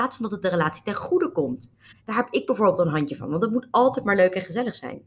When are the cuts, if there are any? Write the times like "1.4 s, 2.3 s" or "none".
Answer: 1.9 s